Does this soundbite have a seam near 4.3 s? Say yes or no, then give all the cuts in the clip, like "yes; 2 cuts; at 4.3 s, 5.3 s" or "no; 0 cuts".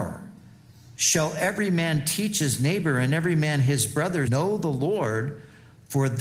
yes; 1 cut; at 4.3 s